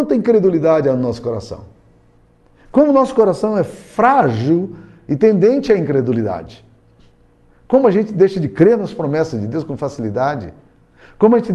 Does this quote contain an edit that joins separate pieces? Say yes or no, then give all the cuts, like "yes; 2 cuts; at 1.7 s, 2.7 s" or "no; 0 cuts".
no; 0 cuts